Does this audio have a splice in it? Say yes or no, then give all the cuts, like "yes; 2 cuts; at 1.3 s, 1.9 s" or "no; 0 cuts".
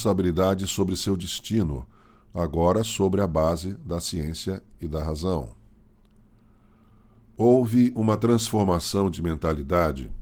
no; 0 cuts